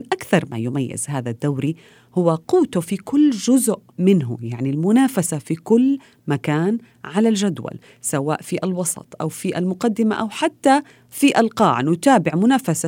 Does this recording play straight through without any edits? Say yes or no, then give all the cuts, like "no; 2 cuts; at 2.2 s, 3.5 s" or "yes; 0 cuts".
no; 1 cut; at 3.9 s